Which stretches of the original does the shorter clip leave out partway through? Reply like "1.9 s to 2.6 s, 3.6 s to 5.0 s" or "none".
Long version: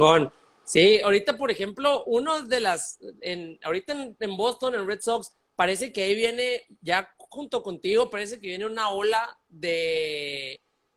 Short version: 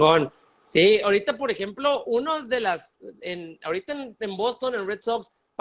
none